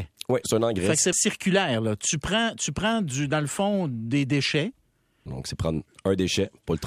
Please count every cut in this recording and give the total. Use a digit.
2